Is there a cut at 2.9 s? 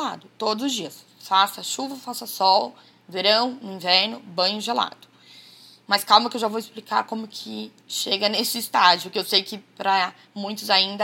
no; 0 cuts

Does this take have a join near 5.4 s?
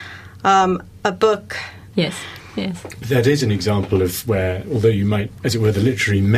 yes; 2 cuts; at 1.9 s, 5.4 s

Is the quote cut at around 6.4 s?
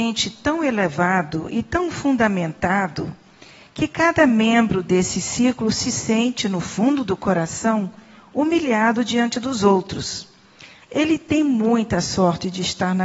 no; 1 cut; at 10.8 s

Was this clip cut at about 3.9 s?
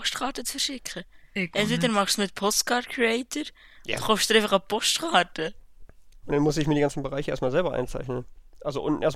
yes; 2 cuts; at 3.9 s, 6.2 s

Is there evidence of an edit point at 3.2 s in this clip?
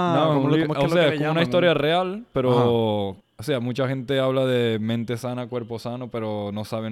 yes; 1 cut; at 3.2 s

